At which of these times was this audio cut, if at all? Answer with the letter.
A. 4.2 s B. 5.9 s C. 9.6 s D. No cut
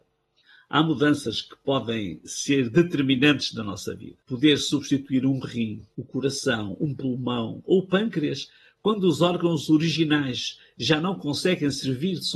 A